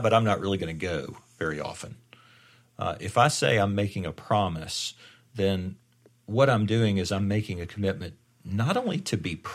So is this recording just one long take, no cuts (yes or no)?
yes